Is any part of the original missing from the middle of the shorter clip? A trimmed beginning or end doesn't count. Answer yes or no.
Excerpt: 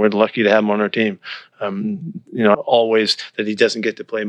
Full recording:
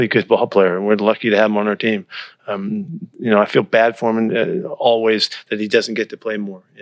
yes